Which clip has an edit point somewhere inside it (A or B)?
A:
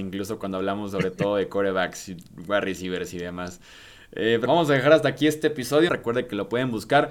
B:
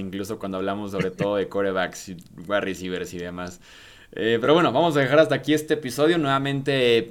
A